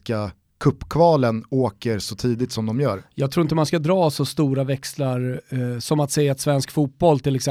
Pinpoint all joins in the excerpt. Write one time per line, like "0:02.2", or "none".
none